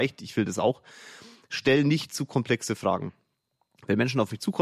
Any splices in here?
no; 0 cuts

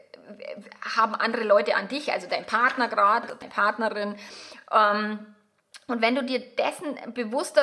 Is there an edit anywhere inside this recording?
no; 0 cuts

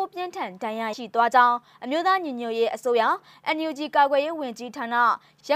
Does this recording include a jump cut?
yes; 1 cut; at 0.9 s

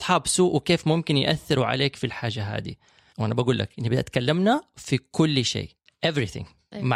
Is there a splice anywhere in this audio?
yes; 1 cut; at 3.1 s

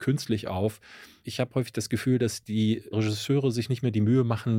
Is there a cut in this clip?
no; 0 cuts

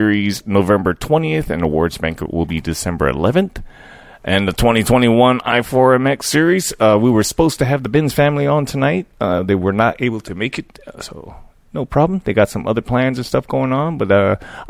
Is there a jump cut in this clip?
no; 0 cuts

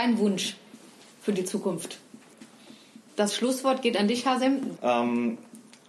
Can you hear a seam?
yes; 2 cuts; at 3.1 s, 4.8 s

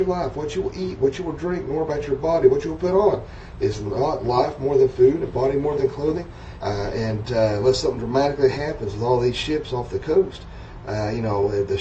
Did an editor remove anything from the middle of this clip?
yes; 1 cut; at 6.6 s

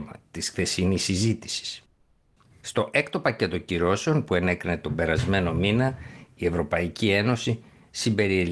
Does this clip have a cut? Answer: yes; 1 cut; at 2.5 s

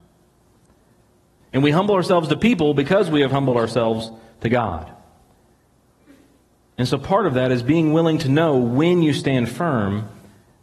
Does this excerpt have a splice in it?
yes; 1 cut; at 1.4 s

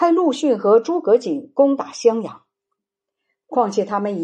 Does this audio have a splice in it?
yes; 1 cut; at 2.8 s

